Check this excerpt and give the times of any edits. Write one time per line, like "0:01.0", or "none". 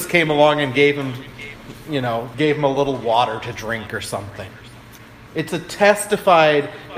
0:02.3
0:05.3